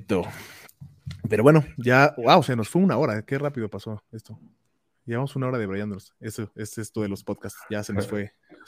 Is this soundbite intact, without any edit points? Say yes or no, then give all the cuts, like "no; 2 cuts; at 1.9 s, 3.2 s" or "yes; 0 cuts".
yes; 0 cuts